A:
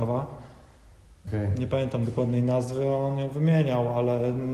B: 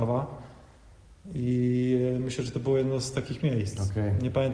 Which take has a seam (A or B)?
A